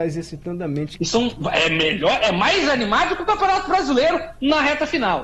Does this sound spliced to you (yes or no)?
yes